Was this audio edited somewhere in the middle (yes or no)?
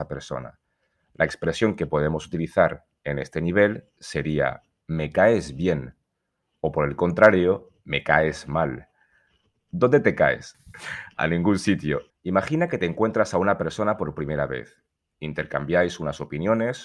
yes